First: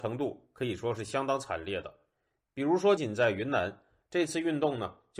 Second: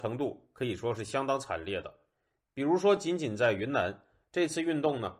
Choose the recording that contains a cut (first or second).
first